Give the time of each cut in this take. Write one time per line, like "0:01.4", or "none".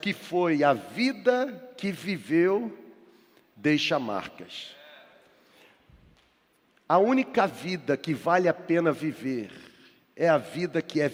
none